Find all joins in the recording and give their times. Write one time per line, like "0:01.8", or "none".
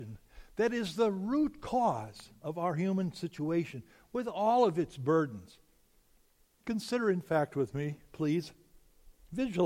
none

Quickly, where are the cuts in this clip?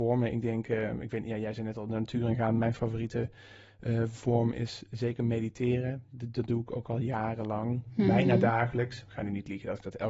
none

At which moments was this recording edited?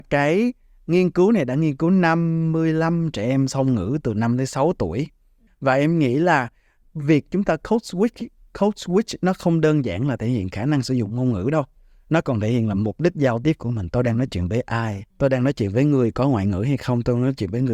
0:05.5
0:06.8
0:15.1

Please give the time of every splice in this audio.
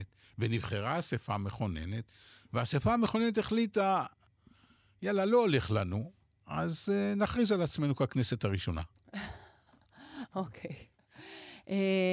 none

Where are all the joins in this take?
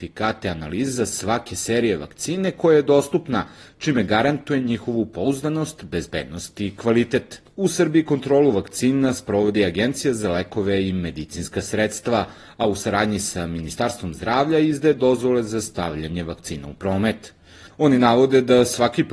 0:07.5
0:17.7

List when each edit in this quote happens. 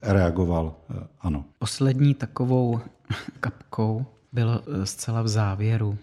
0:01.5
0:03.3

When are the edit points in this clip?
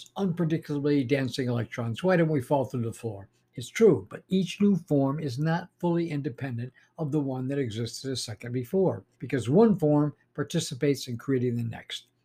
0:03.4
0:09.1

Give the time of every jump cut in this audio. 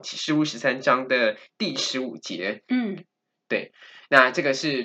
none

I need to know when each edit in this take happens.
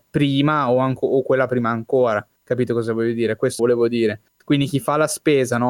0:03.6

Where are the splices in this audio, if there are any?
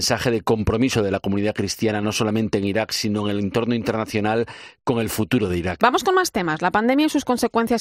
0:05.8

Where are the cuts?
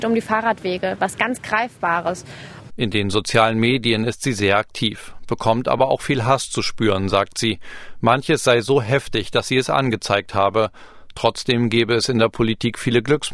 0:02.7

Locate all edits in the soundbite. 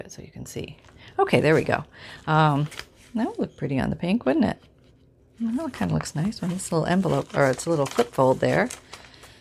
none

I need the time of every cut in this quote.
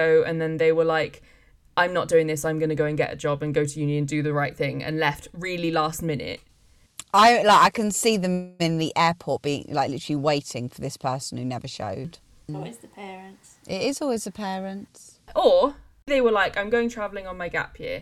0:12.5
0:16.1

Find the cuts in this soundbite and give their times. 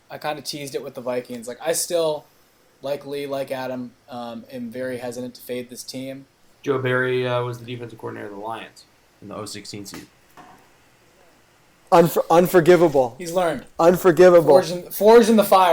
0:06.5

